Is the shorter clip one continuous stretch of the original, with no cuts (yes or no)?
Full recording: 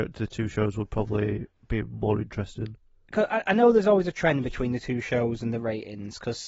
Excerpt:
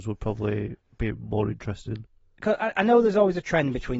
yes